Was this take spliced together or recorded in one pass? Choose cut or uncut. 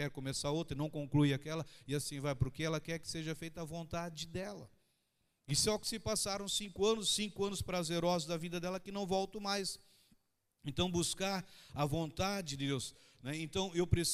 uncut